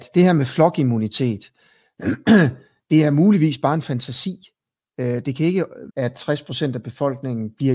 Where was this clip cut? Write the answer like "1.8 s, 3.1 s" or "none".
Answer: 5.9 s